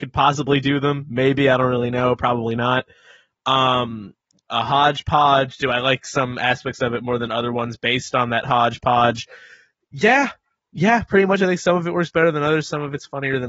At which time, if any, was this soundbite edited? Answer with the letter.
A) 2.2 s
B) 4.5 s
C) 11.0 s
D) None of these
B